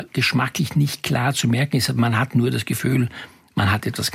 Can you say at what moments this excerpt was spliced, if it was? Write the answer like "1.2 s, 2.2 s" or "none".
none